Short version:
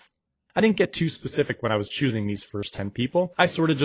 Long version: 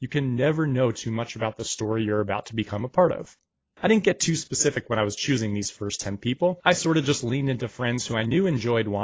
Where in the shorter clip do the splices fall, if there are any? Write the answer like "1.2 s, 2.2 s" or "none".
none